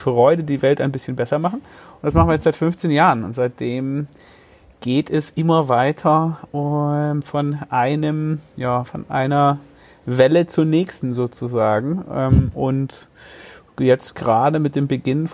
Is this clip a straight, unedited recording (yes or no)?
yes